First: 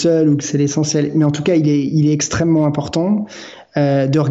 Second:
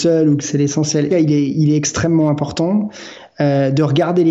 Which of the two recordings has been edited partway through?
second; 1 cut; at 1.1 s

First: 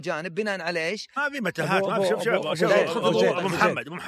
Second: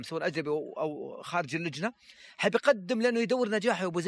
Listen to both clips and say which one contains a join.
first; 1 cut; at 1.2 s

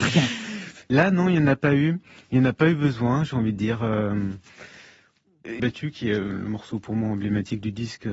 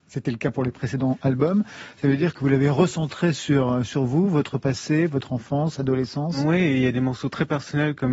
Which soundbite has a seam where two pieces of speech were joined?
first; 1 cut; at 5.6 s

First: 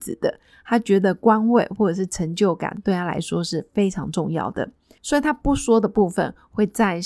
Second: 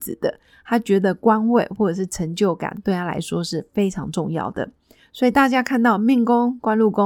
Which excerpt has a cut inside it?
first; 1 cut; at 5.0 s

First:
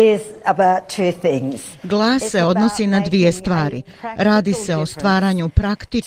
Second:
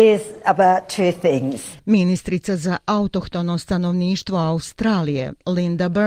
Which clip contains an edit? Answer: second; 1 cut; at 1.8 s

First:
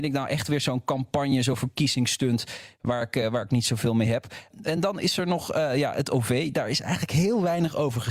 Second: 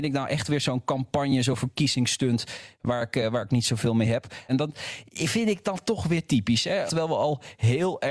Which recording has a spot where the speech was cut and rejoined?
second; 2 cuts; at 4.5 s, 6.9 s

